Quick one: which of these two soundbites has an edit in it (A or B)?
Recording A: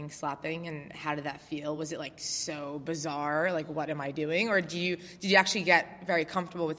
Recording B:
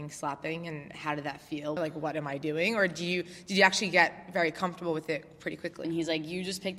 B